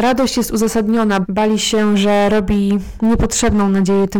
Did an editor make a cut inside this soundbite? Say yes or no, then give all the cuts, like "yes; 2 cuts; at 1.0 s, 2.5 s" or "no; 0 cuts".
yes; 1 cut; at 1.2 s